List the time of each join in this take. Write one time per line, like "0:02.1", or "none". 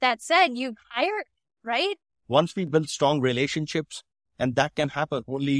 0:02.1